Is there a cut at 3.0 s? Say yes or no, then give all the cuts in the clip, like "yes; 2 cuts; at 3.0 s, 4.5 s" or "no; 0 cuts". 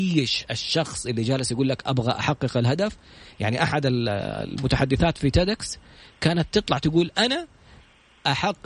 no; 0 cuts